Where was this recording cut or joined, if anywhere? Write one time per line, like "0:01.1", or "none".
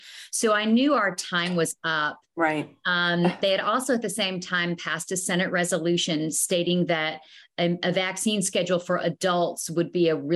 0:03.4